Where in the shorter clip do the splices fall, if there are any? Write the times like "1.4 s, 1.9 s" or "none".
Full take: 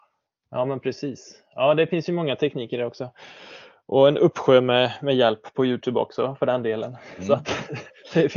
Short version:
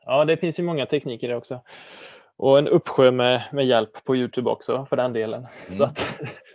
none